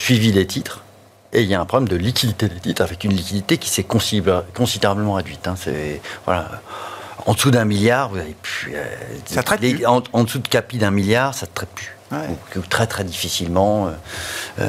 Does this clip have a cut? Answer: no; 0 cuts

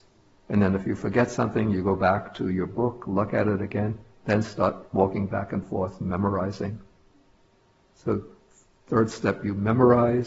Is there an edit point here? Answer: no; 0 cuts

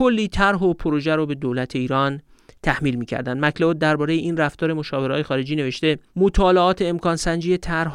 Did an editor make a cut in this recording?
yes; 1 cut; at 6.1 s

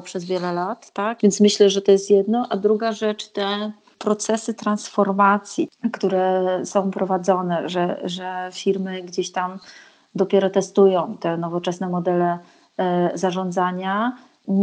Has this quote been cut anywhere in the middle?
yes; 1 cut; at 1.2 s

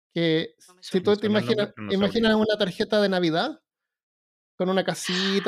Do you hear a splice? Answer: no; 0 cuts

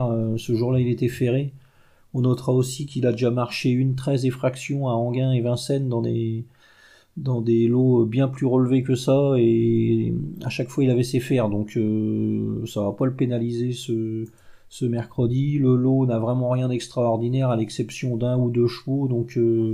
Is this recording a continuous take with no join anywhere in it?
yes; 0 cuts

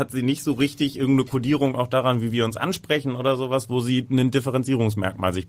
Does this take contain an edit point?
no; 0 cuts

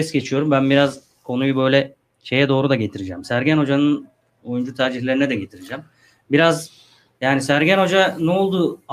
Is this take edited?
no; 0 cuts

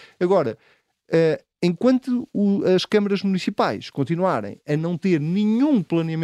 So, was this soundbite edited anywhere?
no; 0 cuts

